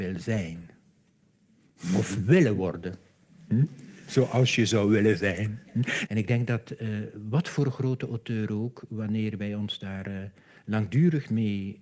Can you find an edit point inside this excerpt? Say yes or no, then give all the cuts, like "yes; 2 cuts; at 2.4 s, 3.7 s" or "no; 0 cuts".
yes; 1 cut; at 6.1 s